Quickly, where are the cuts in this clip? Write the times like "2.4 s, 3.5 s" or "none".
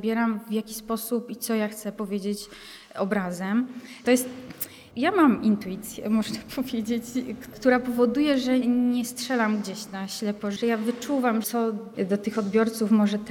4.0 s, 8.6 s